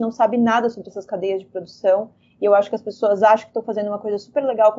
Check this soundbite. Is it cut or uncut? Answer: uncut